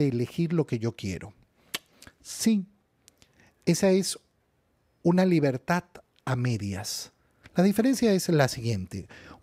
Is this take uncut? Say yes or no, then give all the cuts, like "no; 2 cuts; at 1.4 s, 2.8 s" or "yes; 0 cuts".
no; 1 cut; at 7.4 s